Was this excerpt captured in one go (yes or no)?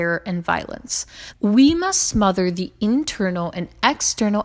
no